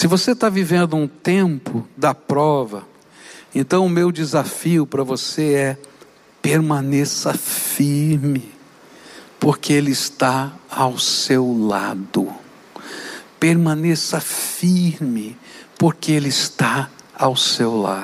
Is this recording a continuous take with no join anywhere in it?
yes; 0 cuts

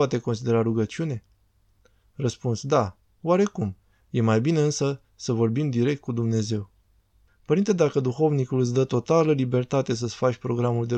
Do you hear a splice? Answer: yes; 1 cut; at 7.3 s

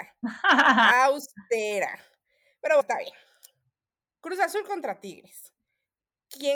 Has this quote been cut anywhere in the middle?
yes; 1 cut; at 2.8 s

